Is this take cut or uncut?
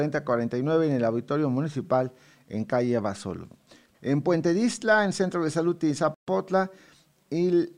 cut